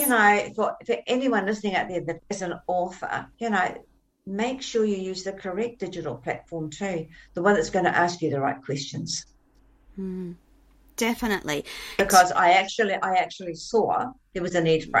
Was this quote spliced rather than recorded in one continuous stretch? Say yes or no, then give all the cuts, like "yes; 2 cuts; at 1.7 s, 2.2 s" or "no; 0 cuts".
yes; 2 cuts; at 3.3 s, 12.0 s